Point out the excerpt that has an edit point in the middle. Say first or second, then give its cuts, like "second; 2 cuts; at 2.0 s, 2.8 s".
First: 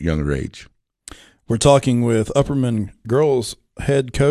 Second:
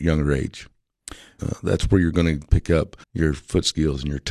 second; 2 cuts; at 1.4 s, 3.0 s